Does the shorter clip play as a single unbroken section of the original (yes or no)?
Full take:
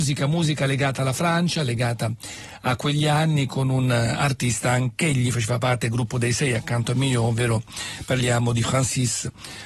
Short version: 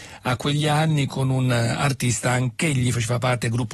yes